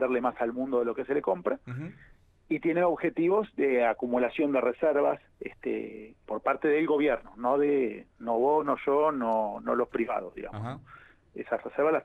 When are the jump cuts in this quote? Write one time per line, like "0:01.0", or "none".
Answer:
0:06.2

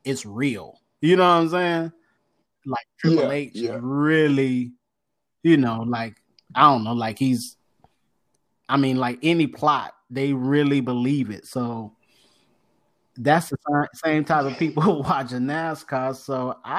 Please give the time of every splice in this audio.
none

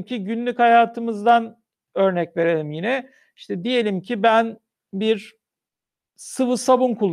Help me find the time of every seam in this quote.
none

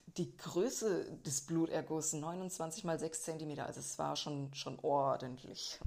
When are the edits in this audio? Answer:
none

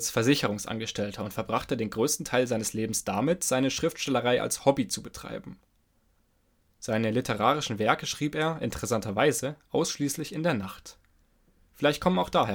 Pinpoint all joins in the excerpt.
0:06.6

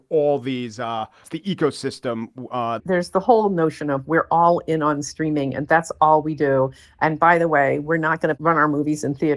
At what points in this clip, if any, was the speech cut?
0:01.2
0:02.8

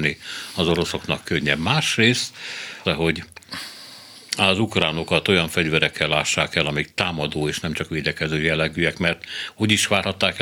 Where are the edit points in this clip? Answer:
0:02.8

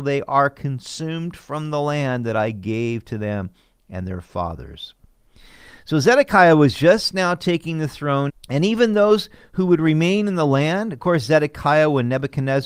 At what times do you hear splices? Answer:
0:08.3

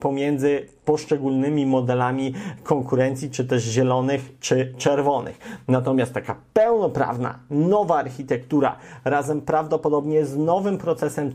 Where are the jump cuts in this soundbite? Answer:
none

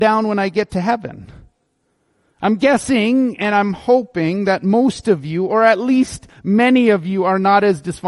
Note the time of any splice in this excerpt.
none

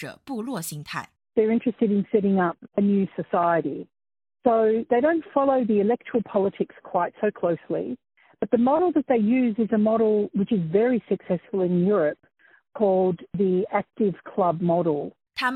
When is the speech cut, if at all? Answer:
none

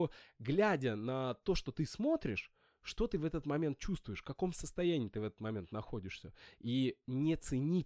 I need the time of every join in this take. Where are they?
0:06.6

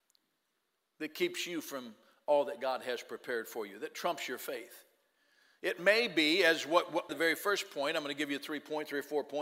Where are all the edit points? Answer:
0:07.1

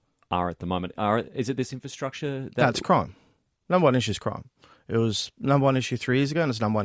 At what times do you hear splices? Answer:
none

